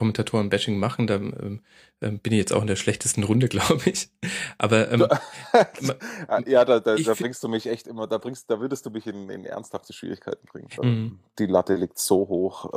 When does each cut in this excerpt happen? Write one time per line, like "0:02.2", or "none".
0:10.8